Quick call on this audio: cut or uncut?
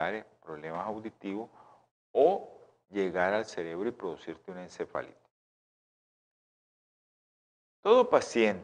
uncut